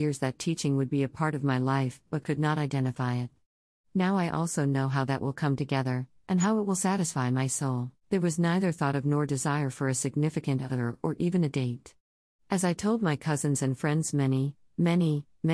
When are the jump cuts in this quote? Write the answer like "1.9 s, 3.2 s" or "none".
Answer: 8.0 s